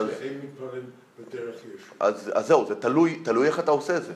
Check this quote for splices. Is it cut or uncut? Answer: uncut